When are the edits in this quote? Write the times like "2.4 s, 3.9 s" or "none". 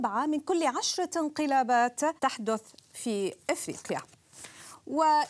2.2 s